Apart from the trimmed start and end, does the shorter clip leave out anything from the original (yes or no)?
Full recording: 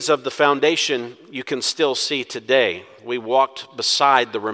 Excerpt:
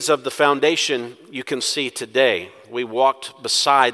yes